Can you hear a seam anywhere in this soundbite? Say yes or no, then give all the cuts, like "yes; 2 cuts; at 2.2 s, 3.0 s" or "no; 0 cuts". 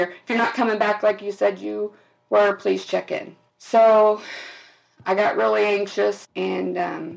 yes; 2 cuts; at 3.5 s, 6.2 s